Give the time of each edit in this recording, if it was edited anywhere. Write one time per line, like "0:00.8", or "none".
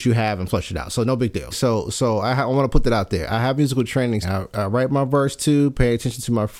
0:01.5
0:04.2